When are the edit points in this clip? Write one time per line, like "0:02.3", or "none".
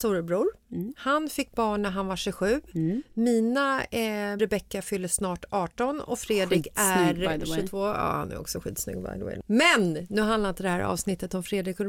0:04.4